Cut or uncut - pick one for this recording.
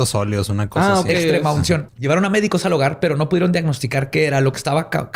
cut